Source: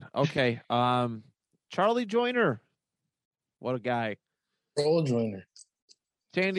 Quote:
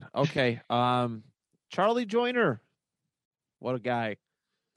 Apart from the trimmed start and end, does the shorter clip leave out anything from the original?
no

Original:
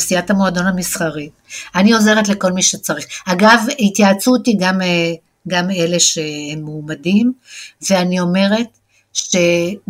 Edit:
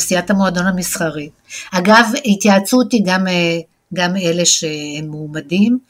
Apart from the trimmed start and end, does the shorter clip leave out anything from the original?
yes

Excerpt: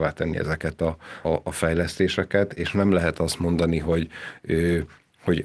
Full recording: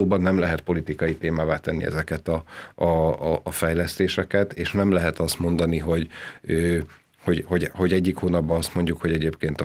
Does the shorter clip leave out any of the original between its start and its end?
yes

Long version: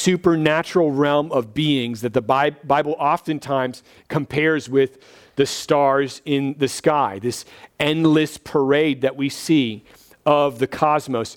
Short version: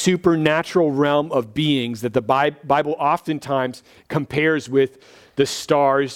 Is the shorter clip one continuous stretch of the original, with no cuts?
yes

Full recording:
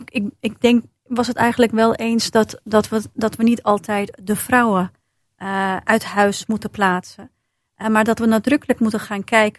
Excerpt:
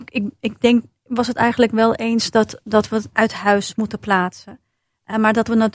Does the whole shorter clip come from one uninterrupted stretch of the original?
no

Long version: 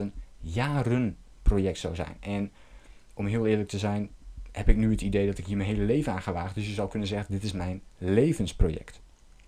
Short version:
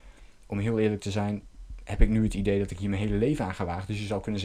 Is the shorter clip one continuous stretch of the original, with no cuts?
yes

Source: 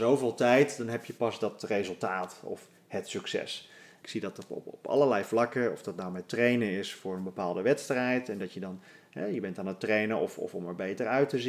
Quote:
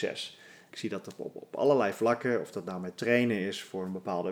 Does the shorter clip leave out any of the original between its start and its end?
no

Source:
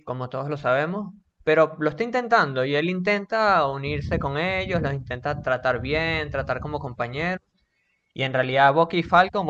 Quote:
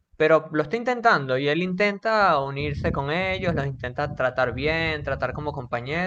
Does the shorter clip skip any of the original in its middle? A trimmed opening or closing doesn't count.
no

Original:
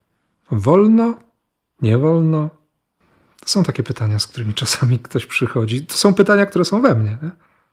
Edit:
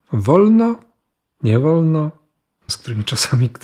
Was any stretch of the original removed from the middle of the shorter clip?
yes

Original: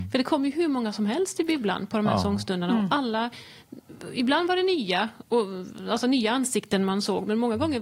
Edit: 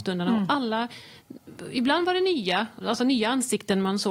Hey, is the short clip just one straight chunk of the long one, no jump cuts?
no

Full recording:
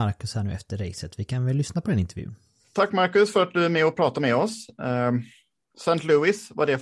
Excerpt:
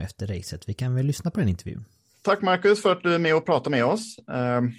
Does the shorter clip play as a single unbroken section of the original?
yes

